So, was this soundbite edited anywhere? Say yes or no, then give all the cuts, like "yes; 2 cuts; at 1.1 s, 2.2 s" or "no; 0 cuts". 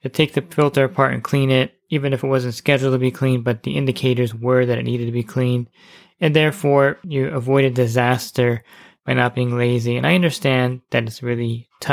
yes; 1 cut; at 7.0 s